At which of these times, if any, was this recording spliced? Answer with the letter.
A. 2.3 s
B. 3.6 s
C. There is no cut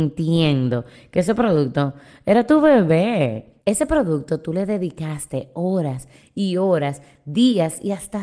C